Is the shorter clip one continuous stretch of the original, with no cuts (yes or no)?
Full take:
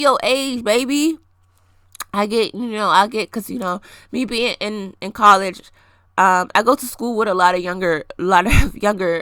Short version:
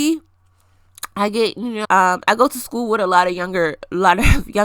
no